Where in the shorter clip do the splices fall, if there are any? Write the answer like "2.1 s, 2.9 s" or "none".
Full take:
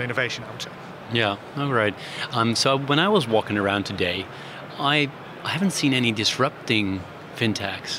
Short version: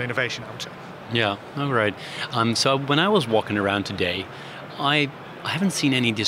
none